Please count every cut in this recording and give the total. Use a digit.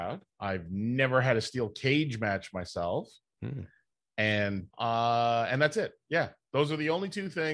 0